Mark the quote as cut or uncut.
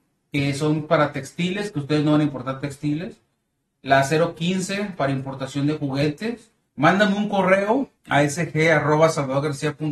cut